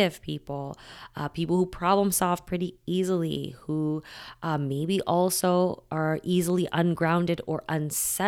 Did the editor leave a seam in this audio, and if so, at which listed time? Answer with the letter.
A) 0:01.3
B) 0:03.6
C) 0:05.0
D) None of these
D